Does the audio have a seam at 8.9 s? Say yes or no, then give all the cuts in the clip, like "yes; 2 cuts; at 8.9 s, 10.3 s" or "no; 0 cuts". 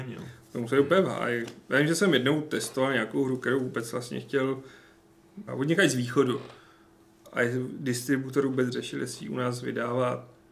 no; 1 cut; at 5.5 s